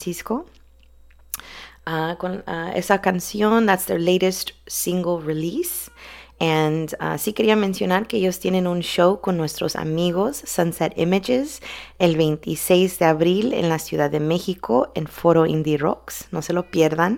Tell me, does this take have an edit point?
no; 0 cuts

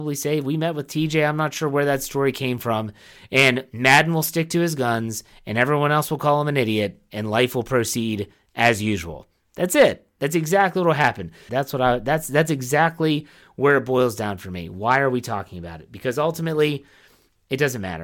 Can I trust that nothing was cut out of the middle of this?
no; 1 cut; at 11.5 s

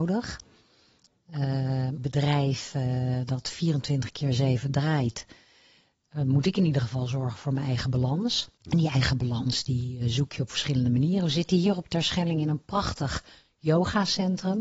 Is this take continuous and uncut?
no; 2 cuts; at 2.0 s, 8.6 s

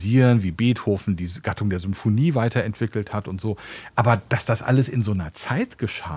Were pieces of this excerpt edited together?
no; 0 cuts

